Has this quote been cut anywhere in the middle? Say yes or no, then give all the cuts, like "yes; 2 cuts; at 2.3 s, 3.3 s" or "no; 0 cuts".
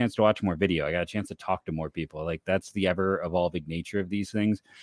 no; 0 cuts